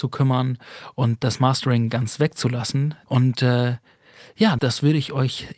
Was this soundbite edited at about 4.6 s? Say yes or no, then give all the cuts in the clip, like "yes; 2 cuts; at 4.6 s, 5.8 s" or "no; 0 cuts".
yes; 2 cuts; at 3.1 s, 4.6 s